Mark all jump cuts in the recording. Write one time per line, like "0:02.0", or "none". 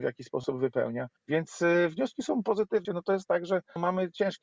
0:01.2
0:02.8